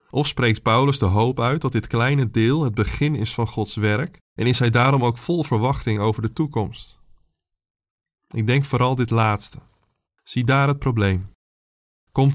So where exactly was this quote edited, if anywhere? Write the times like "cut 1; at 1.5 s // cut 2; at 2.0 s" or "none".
cut 1; at 10.1 s